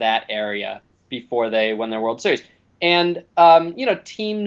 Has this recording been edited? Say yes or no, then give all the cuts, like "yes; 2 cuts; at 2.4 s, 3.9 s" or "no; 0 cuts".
no; 0 cuts